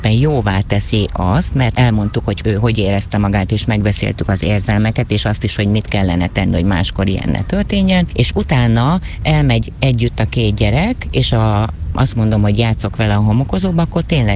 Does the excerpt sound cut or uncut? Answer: uncut